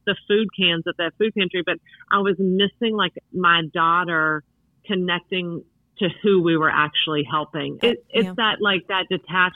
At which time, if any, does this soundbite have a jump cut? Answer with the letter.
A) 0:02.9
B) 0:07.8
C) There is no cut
B